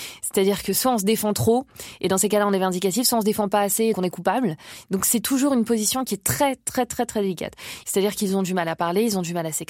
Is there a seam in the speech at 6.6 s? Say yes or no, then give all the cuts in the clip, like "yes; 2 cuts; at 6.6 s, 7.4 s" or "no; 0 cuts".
no; 2 cuts; at 3.9 s, 7.8 s